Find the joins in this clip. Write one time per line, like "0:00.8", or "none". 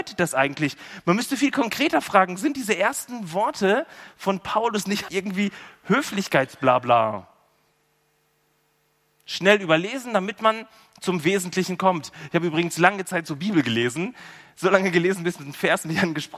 0:05.1